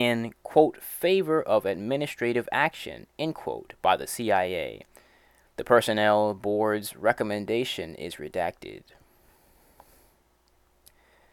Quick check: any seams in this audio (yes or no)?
no